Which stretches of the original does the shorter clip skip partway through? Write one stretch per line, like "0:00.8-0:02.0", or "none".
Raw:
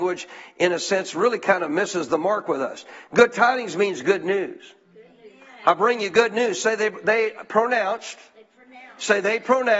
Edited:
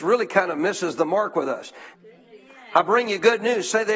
0:03.1-0:04.9